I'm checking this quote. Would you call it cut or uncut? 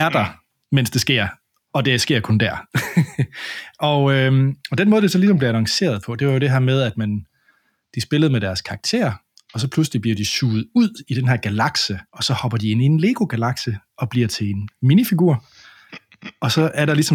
cut